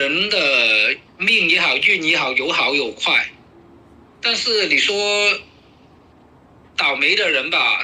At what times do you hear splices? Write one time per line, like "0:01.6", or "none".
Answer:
0:01.1